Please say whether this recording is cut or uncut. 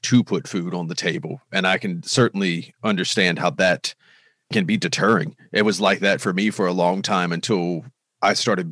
uncut